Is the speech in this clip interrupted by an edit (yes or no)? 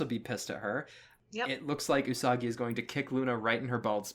no